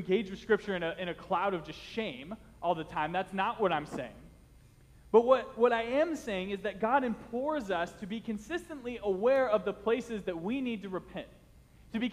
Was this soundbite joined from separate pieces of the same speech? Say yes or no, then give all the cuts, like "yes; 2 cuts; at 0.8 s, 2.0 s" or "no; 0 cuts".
no; 0 cuts